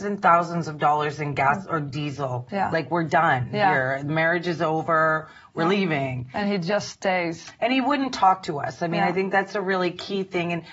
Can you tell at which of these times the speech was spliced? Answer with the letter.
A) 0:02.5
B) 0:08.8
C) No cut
A